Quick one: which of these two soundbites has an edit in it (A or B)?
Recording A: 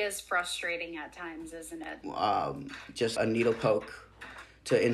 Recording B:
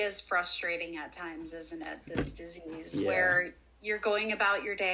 A